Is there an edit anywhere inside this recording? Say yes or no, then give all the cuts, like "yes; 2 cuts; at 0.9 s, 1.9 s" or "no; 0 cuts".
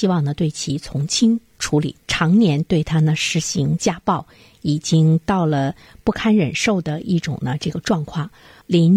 yes; 1 cut; at 2.0 s